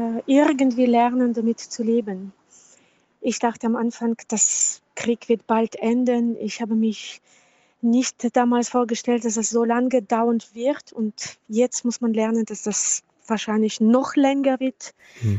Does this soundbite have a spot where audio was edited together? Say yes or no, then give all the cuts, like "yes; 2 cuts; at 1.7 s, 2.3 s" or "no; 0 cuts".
yes; 1 cut; at 4.2 s